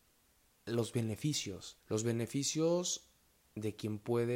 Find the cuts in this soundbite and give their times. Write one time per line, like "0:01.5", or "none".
0:01.8